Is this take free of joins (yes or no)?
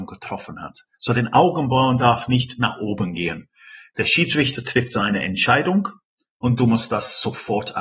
yes